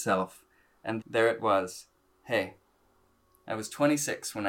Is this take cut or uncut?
cut